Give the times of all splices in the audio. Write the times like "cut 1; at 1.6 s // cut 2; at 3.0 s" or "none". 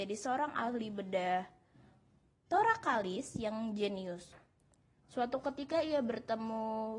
none